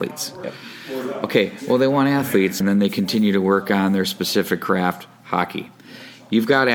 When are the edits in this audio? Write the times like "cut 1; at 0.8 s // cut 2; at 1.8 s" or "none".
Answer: cut 1; at 2.6 s